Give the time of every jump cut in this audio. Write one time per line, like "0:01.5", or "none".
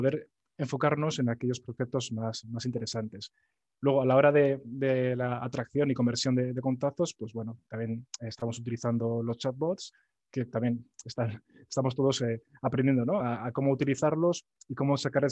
none